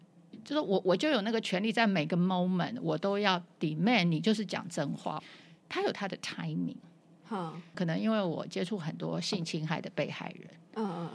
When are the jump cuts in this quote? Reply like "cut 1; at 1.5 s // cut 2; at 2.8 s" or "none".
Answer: cut 1; at 5.2 s // cut 2; at 7.7 s